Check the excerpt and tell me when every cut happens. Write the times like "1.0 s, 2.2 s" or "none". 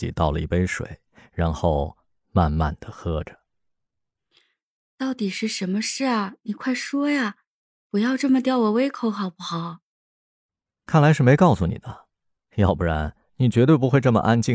10.7 s